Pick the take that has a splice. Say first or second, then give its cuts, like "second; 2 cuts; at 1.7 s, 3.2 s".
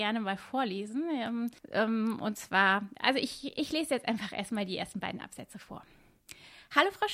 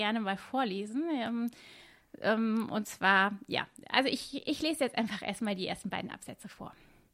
first; 2 cuts; at 1.6 s, 3.0 s